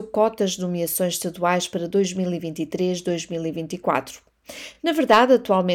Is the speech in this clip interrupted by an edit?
no; 0 cuts

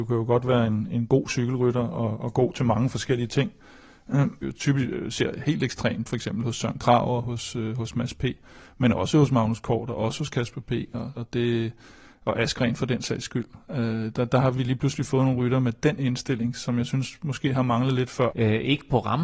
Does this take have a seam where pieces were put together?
yes; 3 cuts; at 4.4 s, 11.1 s, 18.3 s

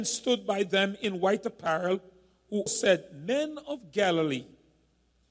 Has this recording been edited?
yes; 1 cut; at 2.7 s

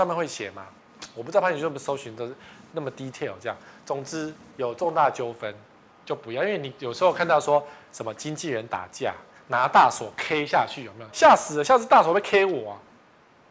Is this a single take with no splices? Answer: no; 1 cut; at 11.1 s

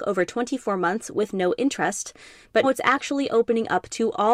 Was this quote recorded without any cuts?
no; 1 cut; at 2.6 s

